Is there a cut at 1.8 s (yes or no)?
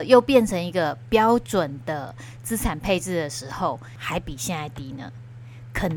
no